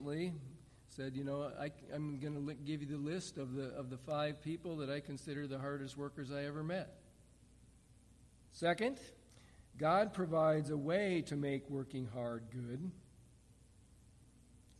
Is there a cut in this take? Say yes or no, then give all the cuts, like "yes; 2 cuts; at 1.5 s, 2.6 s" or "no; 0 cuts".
yes; 1 cut; at 8.4 s